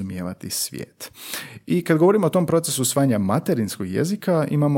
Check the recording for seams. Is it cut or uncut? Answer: uncut